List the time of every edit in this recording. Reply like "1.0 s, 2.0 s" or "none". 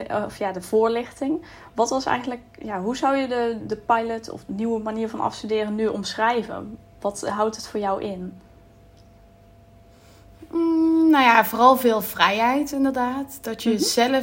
none